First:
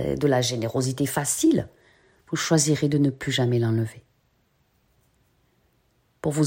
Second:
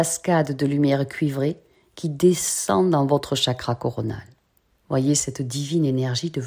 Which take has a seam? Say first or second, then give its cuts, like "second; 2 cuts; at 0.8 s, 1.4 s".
second; 1 cut; at 4.7 s